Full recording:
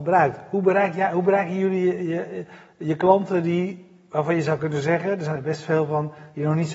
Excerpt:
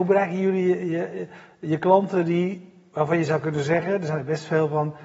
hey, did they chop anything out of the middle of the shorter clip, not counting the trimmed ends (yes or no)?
no